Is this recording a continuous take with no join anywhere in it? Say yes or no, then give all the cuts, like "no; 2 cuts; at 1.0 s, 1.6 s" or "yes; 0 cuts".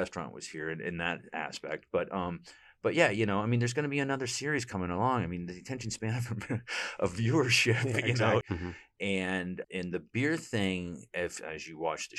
no; 2 cuts; at 8.4 s, 9.6 s